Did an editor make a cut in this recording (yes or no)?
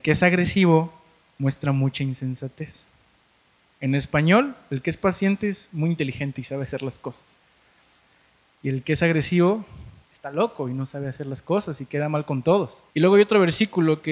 yes